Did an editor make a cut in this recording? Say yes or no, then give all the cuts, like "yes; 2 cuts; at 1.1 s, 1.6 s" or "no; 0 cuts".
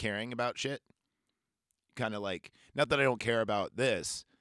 no; 0 cuts